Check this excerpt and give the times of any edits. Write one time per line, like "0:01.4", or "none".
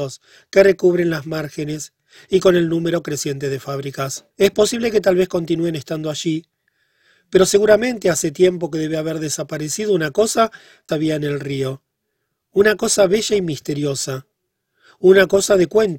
0:04.3
0:10.9